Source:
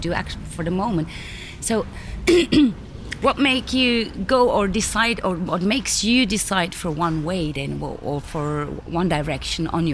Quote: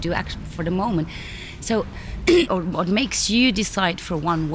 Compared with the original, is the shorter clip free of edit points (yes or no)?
no